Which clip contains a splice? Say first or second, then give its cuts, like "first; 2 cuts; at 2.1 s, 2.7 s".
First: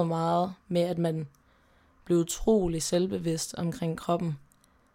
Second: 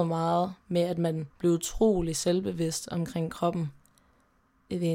second; 1 cut; at 1.3 s